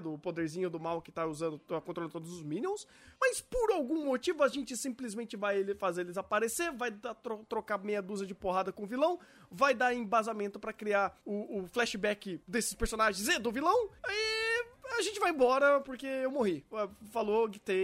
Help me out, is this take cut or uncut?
uncut